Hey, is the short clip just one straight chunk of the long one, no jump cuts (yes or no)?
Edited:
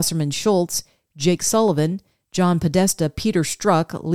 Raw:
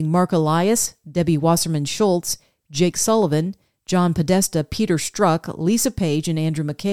yes